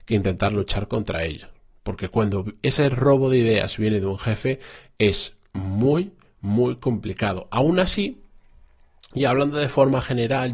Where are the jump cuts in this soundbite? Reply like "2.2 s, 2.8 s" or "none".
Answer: none